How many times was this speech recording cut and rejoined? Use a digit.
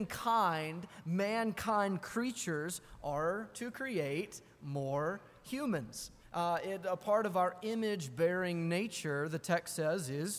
1